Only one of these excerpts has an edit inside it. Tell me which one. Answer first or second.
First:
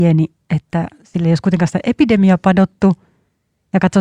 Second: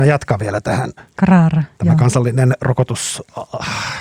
second